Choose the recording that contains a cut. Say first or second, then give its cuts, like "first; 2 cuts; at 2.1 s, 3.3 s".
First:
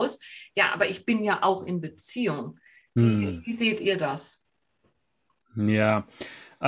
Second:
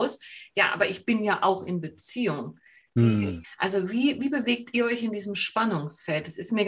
second; 1 cut; at 3.4 s